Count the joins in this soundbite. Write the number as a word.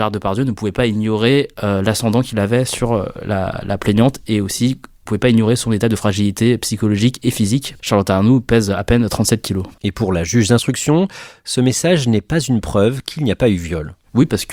two